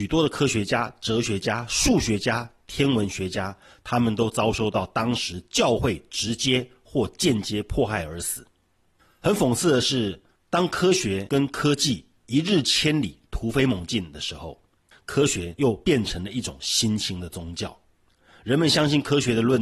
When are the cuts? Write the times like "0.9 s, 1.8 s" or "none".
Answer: none